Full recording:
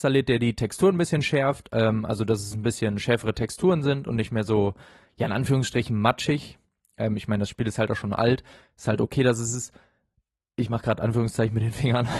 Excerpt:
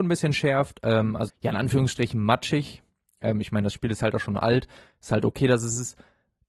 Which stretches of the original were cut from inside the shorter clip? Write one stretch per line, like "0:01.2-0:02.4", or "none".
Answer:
0:02.2-0:05.0